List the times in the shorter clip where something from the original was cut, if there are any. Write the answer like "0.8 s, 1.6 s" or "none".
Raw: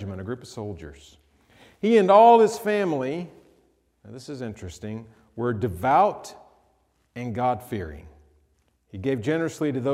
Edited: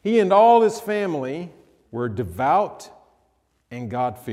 1.8 s